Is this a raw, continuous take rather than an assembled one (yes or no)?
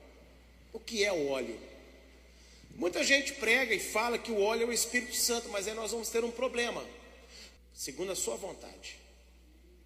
no